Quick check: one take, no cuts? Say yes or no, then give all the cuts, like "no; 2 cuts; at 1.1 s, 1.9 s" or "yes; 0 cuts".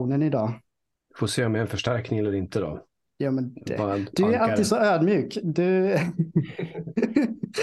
yes; 0 cuts